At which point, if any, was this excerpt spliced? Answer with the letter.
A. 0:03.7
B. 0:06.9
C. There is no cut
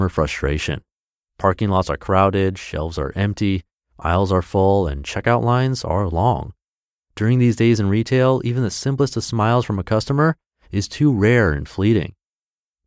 C